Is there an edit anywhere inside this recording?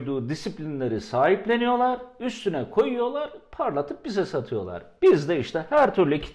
no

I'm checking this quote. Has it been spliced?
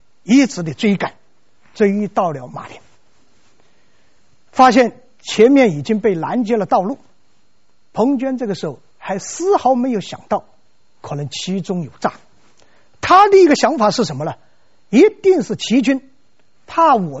no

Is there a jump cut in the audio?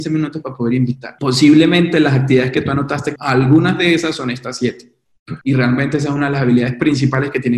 yes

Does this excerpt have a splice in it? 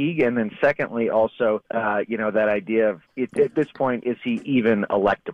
yes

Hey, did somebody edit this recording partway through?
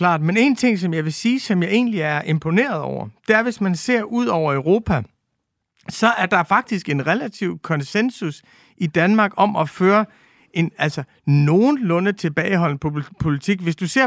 no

